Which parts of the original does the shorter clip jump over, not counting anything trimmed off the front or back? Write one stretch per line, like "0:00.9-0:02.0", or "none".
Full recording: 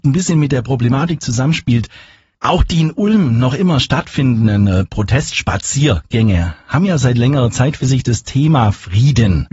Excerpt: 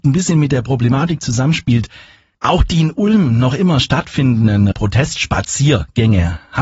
0:04.7-0:04.9